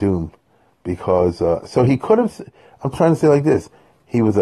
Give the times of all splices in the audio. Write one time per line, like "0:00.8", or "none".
0:02.9